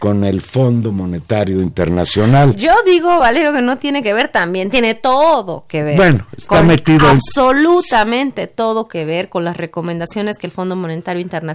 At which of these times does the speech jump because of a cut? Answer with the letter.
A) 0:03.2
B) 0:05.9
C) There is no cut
C